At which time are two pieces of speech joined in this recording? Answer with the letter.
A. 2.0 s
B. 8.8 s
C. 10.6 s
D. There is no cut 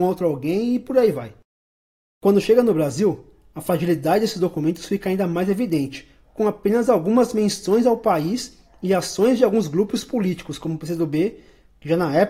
D